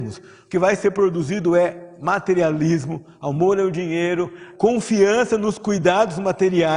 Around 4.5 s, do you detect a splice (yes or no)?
yes